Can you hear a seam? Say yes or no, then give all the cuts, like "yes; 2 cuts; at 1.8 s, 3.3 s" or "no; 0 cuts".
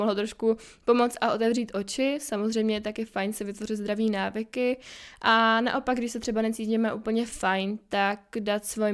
no; 0 cuts